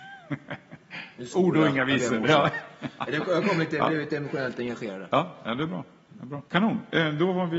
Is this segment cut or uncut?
cut